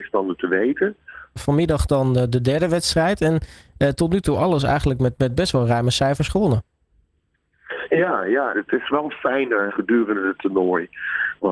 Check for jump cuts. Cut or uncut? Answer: cut